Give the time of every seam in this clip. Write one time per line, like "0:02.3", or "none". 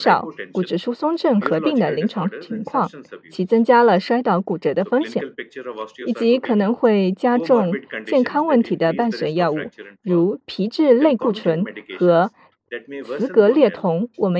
none